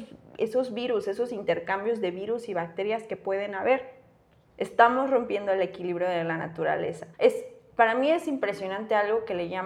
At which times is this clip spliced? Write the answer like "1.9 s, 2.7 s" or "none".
4.5 s, 7.1 s

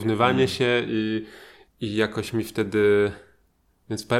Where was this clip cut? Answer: 1.7 s

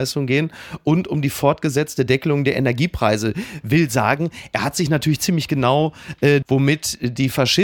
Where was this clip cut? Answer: 6.4 s

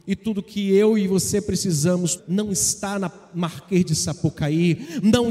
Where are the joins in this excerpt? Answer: 2.2 s

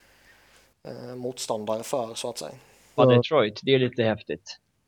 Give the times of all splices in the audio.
3.0 s

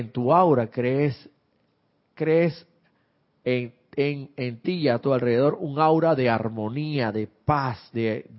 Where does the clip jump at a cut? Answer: none

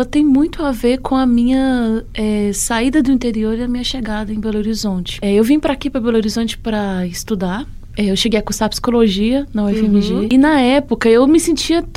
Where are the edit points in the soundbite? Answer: none

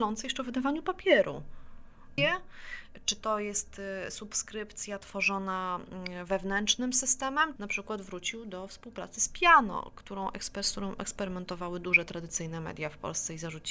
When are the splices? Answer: 2.2 s, 7.6 s

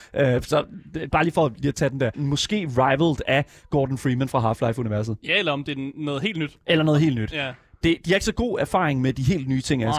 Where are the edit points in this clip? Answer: 2.1 s

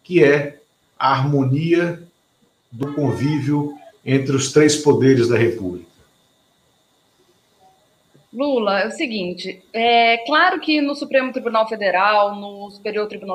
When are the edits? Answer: none

